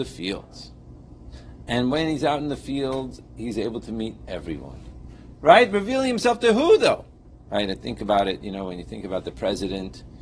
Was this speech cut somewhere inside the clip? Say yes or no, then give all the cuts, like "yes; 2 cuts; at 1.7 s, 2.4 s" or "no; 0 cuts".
yes; 2 cuts; at 5.3 s, 7.5 s